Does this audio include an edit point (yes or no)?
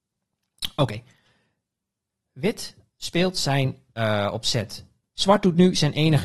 yes